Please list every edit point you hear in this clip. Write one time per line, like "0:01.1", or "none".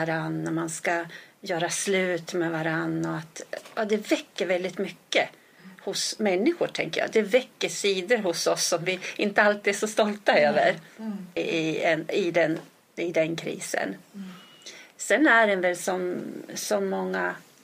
0:11.4